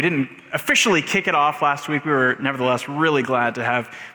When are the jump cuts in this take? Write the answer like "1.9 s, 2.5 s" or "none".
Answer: none